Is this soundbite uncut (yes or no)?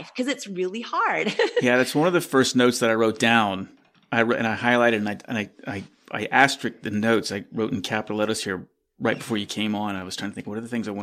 yes